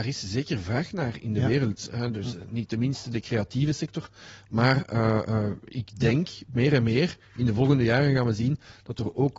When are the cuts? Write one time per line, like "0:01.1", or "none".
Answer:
none